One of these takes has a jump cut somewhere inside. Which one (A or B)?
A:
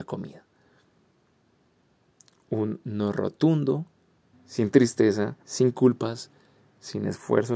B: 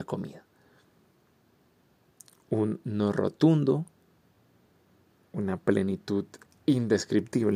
A